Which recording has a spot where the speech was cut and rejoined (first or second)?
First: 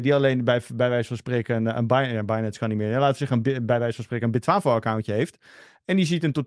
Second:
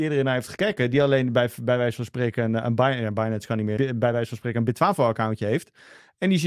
second